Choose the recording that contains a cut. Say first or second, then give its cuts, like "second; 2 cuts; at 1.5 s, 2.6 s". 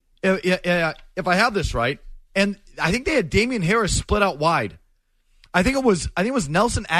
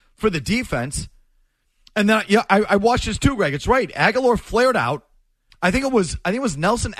second; 1 cut; at 5.5 s